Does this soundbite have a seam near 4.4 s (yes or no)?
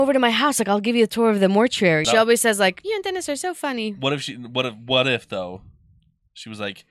no